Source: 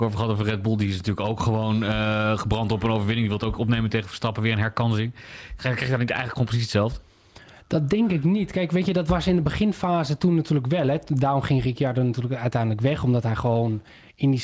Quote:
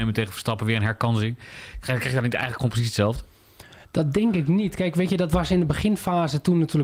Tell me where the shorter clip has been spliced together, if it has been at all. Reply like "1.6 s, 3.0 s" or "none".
none